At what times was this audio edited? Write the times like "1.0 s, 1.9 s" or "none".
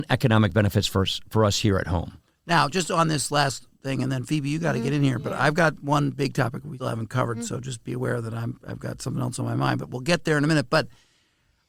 6.8 s